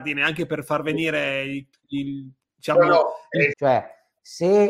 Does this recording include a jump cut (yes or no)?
yes